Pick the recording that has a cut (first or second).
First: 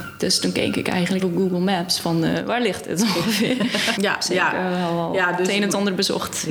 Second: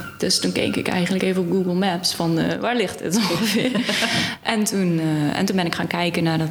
first